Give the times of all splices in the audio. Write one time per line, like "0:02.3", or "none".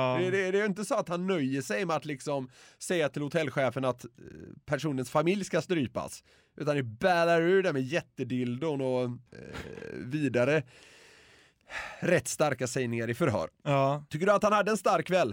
0:09.3